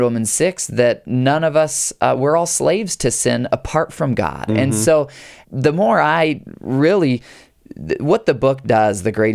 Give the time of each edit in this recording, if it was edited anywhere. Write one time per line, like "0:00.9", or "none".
0:05.4